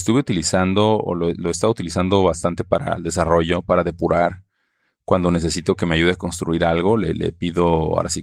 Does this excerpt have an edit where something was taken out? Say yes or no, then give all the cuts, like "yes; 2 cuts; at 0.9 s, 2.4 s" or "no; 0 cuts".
no; 0 cuts